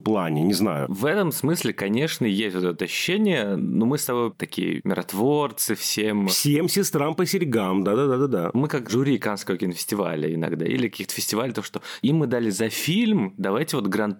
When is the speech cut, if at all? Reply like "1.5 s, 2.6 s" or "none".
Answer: none